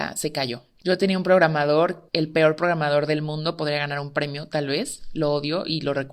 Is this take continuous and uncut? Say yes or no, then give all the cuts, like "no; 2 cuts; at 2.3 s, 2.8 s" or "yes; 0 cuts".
yes; 0 cuts